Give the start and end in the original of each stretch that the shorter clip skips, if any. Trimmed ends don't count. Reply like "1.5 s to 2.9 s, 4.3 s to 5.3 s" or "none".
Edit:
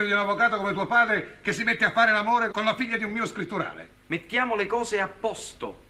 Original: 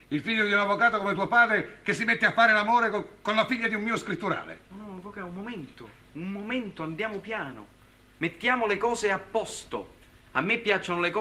2.9 s to 3.2 s, 4.6 s to 8.0 s